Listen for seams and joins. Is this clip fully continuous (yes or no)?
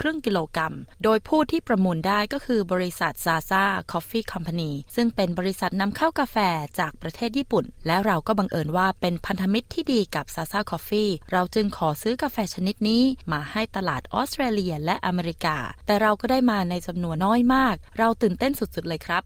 no